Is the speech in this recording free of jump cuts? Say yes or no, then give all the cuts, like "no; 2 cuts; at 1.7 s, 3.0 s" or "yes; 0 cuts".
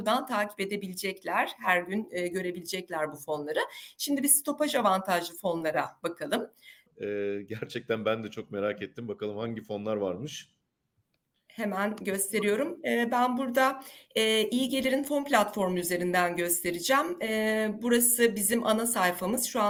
no; 1 cut; at 6.9 s